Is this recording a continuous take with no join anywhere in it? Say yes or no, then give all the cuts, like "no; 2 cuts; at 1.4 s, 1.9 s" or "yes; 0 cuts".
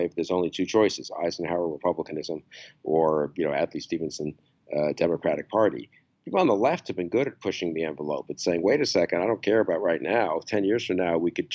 yes; 0 cuts